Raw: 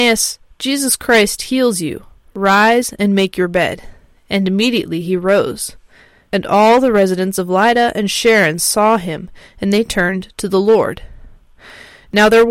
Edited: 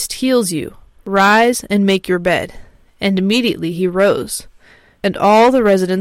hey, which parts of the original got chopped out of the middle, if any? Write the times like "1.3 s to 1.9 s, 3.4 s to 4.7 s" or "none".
none